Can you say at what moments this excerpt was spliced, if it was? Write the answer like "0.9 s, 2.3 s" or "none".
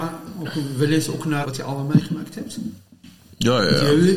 1.4 s